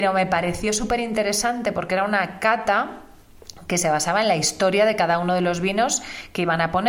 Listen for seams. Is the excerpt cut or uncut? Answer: uncut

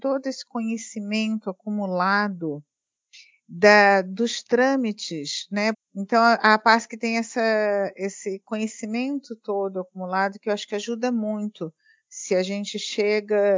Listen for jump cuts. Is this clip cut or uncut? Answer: cut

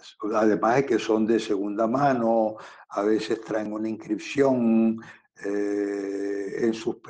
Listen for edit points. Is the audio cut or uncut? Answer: uncut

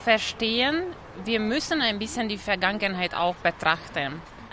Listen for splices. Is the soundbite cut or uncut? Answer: uncut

